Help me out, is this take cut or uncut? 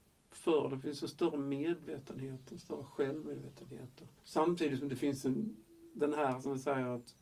cut